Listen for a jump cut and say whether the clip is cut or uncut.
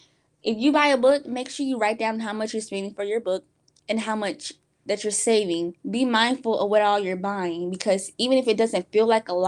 cut